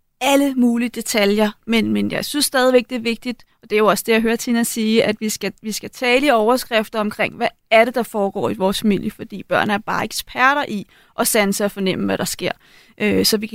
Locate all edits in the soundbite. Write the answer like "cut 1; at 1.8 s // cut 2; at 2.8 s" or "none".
none